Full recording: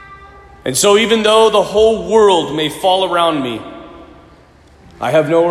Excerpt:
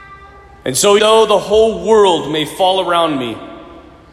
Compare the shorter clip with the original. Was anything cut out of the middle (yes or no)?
yes